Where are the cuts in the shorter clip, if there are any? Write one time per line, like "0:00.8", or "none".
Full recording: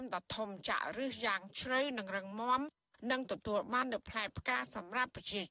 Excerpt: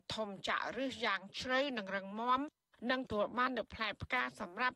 0:03.1